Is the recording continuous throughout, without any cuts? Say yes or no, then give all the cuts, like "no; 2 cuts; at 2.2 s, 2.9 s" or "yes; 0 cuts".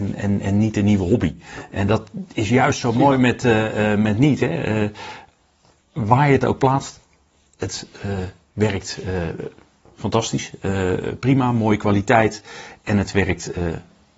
yes; 0 cuts